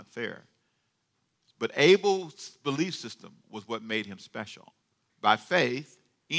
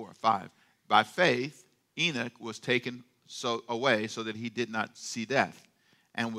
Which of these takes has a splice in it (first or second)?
first